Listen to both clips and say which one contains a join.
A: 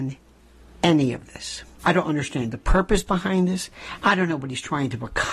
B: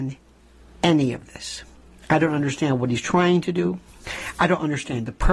A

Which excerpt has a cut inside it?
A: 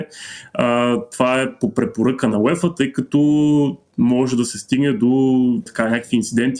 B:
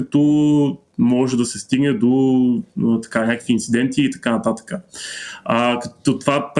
A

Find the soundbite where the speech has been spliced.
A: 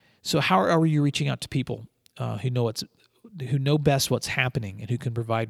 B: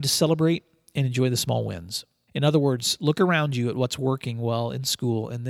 B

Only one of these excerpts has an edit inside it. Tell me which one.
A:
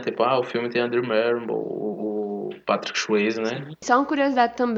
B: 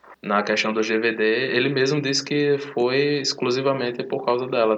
A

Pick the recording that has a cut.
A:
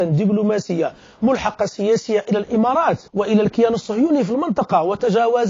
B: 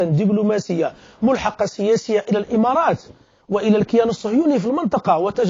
A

